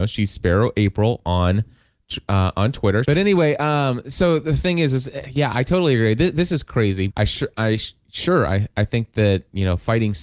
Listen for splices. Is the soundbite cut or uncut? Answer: cut